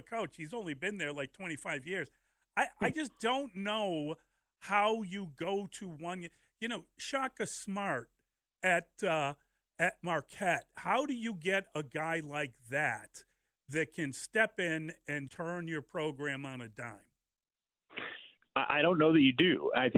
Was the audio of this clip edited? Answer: yes; 1 cut; at 15.3 s

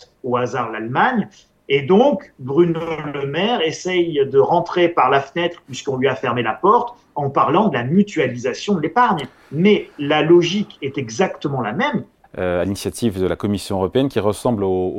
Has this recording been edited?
yes; 1 cut; at 12.2 s

